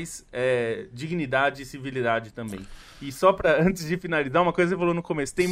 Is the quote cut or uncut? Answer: uncut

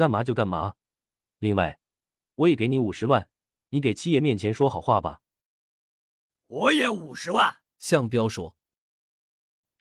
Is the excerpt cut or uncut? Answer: cut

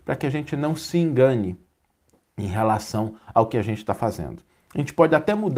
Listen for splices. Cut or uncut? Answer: uncut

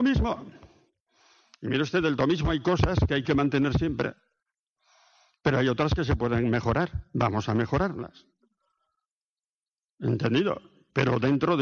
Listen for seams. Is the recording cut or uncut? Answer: uncut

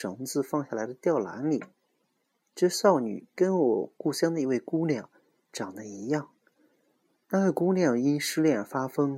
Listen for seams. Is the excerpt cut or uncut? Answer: uncut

